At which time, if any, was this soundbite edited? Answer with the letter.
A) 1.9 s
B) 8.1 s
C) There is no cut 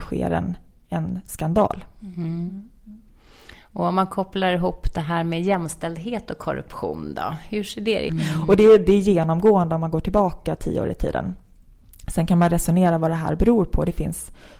B